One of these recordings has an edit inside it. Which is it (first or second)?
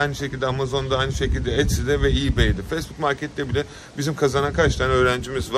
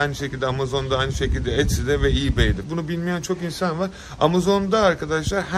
second